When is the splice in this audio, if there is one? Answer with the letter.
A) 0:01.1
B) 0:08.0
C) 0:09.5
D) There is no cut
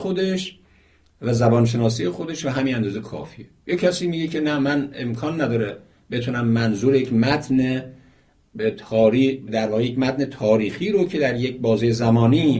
C